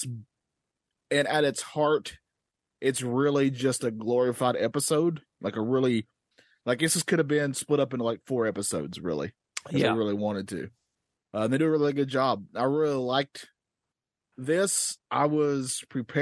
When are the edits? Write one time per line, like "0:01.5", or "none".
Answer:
0:11.2